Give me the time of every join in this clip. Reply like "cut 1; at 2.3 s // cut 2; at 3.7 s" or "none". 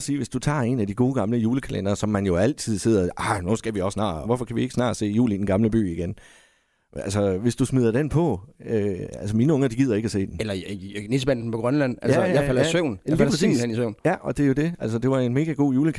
cut 1; at 4.2 s